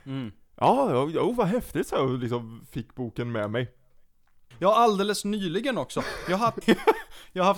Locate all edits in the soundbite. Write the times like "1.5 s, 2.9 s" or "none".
4.5 s, 6.6 s